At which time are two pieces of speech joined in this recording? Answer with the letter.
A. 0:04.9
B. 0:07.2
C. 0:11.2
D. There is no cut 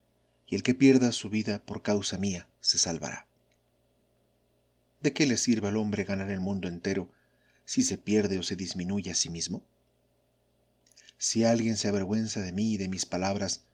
D